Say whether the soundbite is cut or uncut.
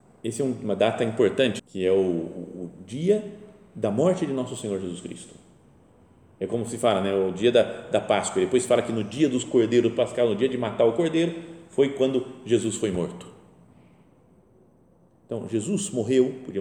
cut